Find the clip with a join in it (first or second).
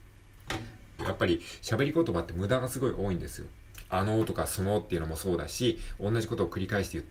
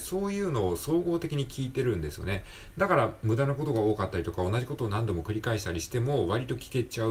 first